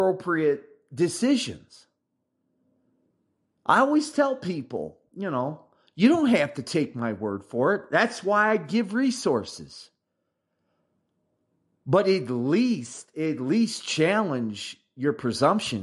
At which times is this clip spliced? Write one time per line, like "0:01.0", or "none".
none